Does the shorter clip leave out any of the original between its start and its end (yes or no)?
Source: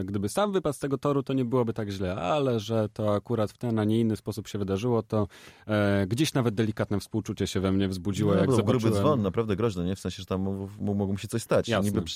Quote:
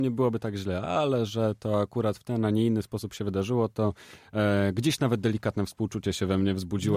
no